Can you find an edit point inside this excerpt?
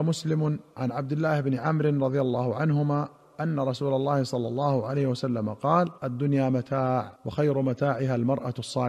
yes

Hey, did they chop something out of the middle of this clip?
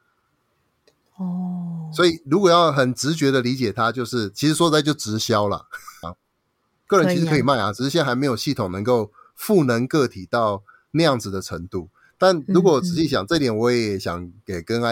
yes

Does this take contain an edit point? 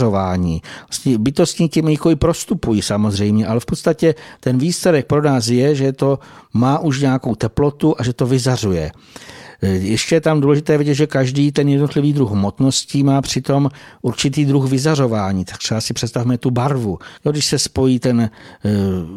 yes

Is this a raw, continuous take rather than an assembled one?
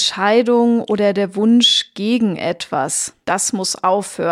no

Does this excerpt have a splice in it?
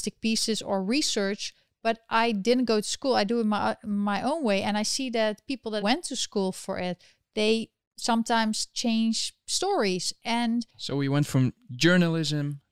yes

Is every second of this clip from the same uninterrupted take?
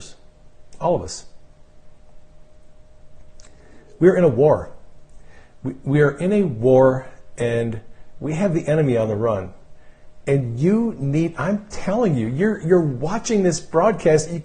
no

